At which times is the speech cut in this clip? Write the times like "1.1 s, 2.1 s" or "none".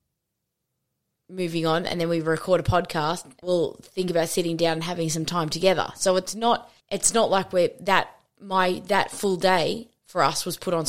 3.4 s, 6.8 s